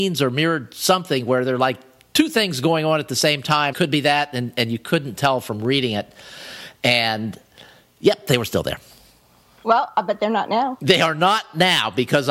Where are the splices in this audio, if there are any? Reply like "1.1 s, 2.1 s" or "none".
3.7 s